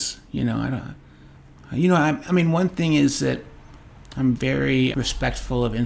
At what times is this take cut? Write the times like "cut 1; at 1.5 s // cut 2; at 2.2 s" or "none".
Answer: cut 1; at 4.9 s

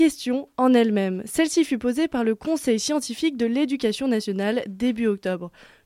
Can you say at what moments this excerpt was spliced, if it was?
none

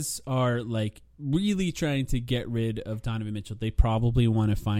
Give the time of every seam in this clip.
cut 1; at 1.1 s

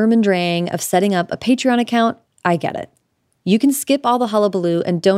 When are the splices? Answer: none

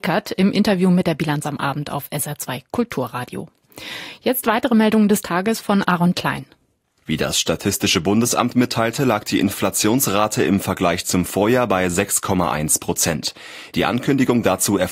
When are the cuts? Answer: cut 1; at 7.0 s // cut 2; at 13.7 s

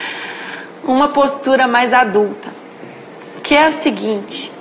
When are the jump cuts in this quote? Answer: none

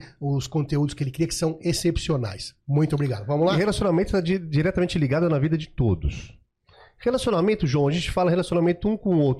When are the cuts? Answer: none

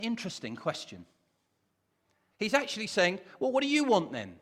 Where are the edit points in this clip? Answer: cut 1; at 2.3 s

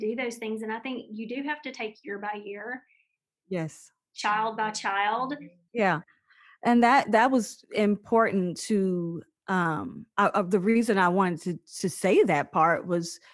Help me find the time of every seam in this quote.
cut 1; at 5.7 s

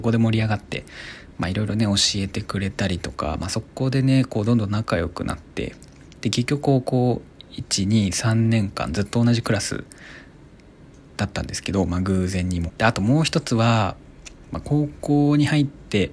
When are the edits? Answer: cut 1; at 12.7 s

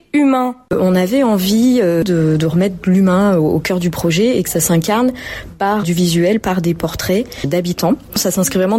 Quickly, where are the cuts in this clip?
cut 1; at 5.8 s

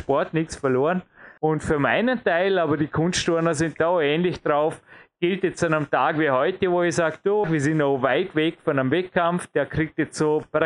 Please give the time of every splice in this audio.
cut 1; at 1.4 s // cut 2; at 7.4 s

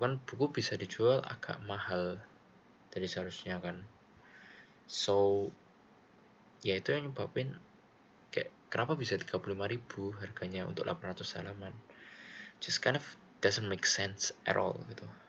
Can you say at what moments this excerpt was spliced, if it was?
none

